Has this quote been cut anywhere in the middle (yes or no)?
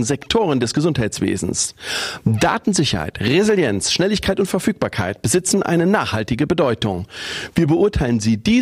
no